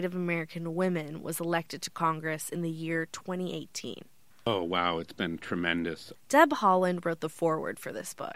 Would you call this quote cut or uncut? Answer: cut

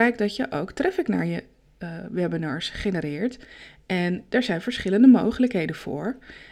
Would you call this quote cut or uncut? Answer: uncut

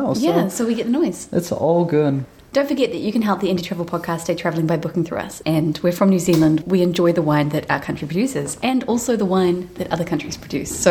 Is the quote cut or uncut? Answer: cut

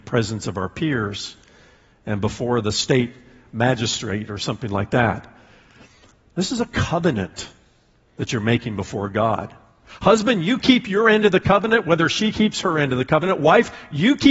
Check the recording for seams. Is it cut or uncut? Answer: uncut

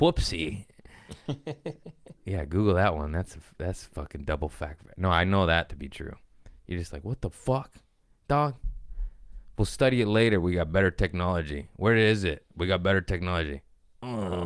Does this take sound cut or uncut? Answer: uncut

